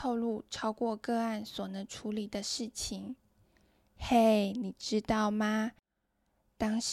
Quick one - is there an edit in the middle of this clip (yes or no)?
no